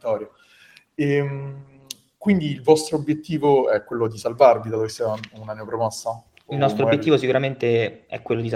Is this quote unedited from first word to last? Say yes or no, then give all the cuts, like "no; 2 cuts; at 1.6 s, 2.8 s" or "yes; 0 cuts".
yes; 0 cuts